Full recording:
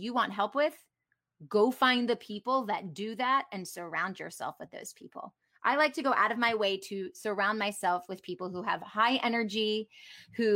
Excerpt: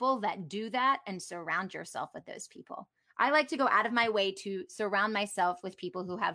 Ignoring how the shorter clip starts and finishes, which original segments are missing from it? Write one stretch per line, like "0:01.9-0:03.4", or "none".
none